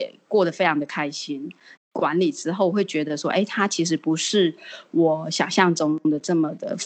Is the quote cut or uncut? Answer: cut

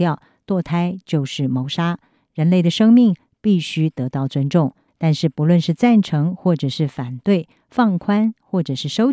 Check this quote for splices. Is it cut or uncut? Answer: cut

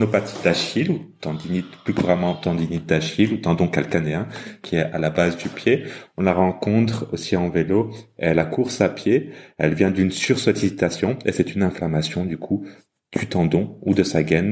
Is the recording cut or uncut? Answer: uncut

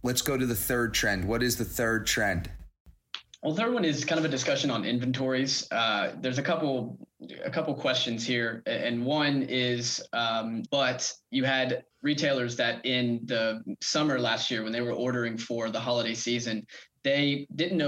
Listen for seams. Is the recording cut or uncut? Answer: cut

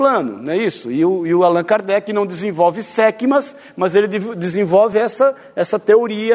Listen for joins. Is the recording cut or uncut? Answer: uncut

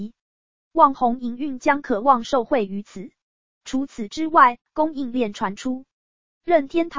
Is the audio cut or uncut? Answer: cut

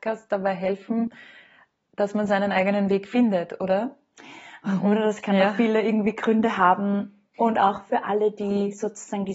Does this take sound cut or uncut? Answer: cut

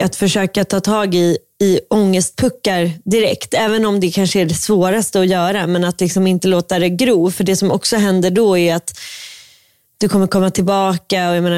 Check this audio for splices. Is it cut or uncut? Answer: uncut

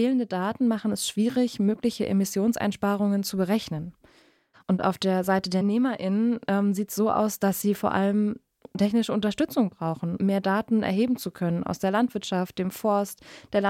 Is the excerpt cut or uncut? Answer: cut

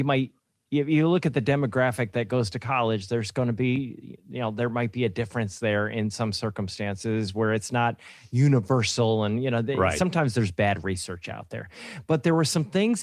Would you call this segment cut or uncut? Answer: uncut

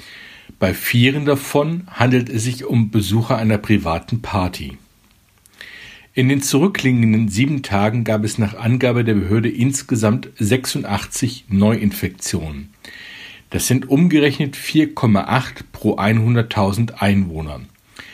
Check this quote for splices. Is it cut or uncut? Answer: uncut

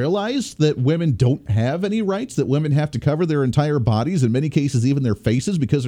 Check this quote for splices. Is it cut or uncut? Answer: uncut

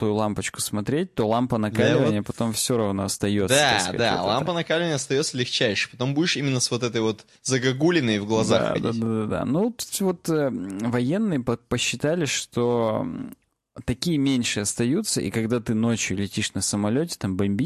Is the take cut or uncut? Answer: uncut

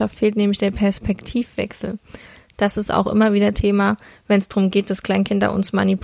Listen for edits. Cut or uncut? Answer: uncut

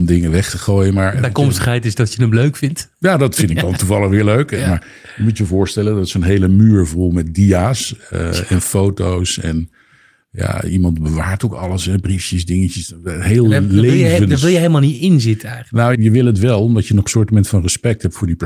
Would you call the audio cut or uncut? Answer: cut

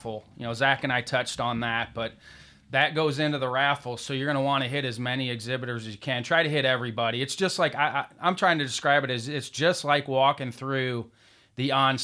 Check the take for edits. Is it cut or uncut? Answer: uncut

